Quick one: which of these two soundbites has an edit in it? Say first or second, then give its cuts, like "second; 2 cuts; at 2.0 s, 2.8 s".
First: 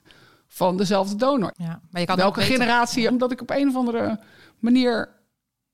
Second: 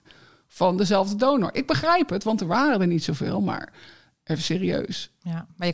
first; 2 cuts; at 1.5 s, 3.1 s